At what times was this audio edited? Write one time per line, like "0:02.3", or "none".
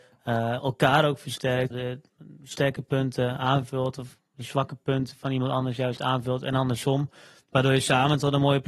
0:01.7